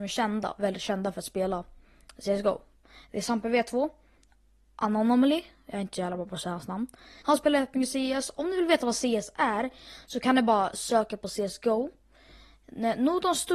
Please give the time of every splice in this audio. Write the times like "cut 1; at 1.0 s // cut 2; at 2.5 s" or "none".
cut 1; at 7.2 s